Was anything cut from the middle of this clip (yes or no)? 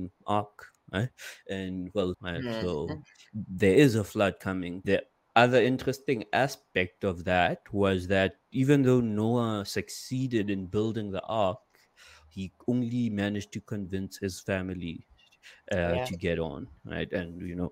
yes